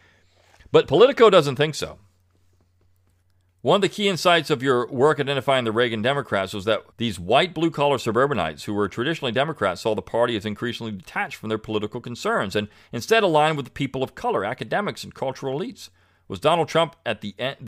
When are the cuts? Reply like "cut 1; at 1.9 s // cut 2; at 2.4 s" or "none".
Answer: cut 1; at 6.9 s